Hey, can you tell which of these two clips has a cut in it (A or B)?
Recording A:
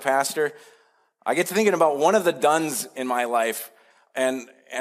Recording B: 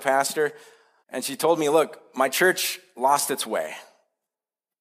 B